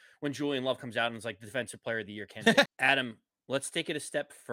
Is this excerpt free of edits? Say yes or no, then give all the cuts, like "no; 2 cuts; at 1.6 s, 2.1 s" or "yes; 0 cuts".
no; 1 cut; at 2.7 s